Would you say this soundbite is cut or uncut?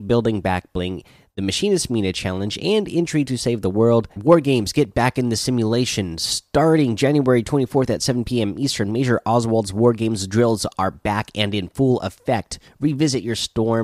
cut